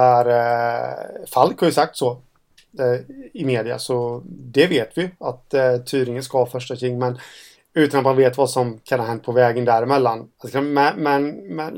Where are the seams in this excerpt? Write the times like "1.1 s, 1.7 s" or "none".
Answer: 10.3 s